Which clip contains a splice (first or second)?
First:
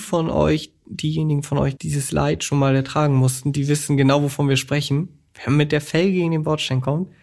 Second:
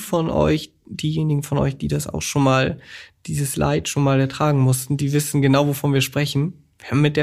first